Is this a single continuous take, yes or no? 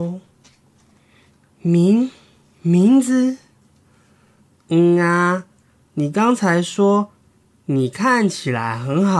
yes